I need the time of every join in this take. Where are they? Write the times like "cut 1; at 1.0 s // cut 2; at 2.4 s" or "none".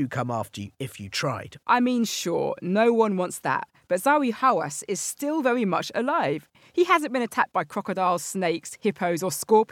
none